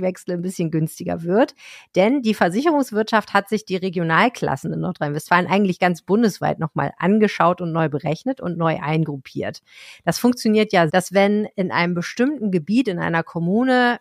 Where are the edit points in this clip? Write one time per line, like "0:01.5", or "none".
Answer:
0:10.9